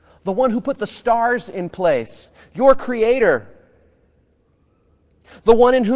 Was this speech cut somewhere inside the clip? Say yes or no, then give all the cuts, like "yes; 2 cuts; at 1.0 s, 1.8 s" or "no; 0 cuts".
no; 0 cuts